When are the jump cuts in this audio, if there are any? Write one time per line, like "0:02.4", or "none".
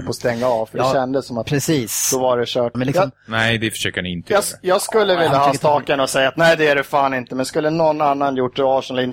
0:02.7